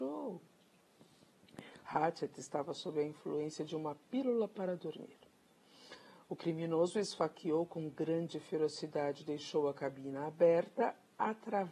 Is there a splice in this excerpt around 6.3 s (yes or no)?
no